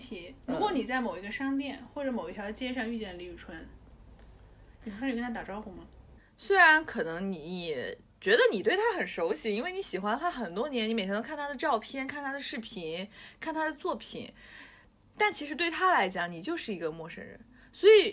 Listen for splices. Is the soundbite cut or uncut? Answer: cut